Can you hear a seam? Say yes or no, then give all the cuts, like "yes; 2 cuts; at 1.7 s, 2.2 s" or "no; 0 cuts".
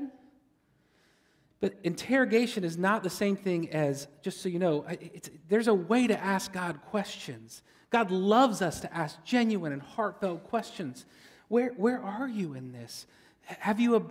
no; 0 cuts